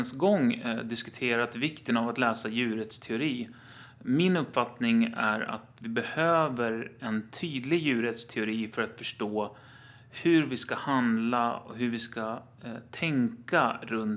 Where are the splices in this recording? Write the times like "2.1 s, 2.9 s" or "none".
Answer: none